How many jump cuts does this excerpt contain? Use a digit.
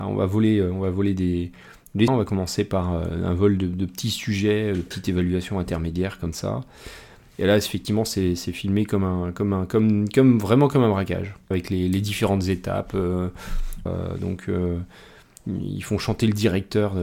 3